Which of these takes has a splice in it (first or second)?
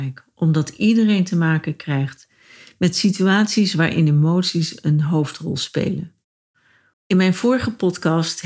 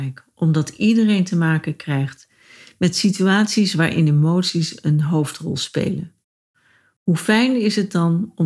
first